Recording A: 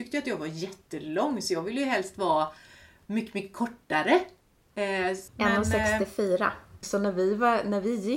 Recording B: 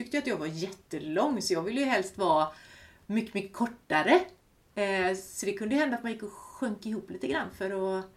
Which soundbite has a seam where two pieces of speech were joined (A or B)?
A